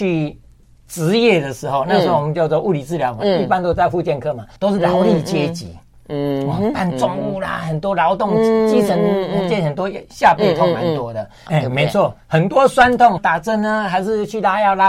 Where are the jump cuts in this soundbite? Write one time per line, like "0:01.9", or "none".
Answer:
0:04.6
0:11.5
0:13.2